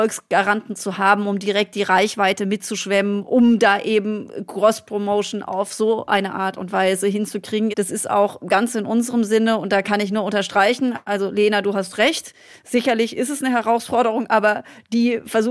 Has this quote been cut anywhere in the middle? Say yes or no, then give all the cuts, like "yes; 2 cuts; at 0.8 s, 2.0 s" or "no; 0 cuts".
yes; 1 cut; at 7.7 s